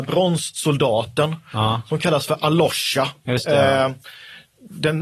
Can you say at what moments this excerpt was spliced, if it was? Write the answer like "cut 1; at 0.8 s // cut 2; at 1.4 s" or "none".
none